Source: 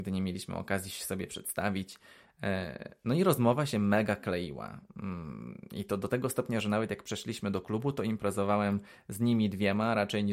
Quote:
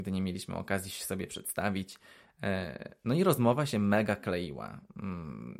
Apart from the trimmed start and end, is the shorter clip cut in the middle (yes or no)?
no